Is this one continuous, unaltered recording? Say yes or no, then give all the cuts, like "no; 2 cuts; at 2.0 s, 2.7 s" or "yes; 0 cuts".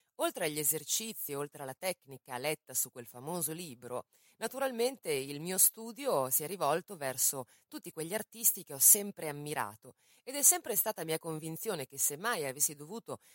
yes; 0 cuts